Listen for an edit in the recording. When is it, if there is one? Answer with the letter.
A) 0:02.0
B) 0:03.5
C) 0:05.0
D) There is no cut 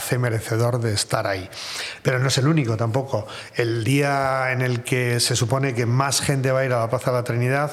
D